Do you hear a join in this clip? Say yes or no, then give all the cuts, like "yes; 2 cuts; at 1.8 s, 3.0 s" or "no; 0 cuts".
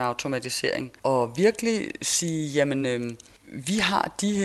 no; 0 cuts